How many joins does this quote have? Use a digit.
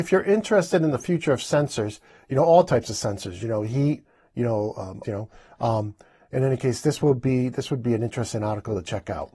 1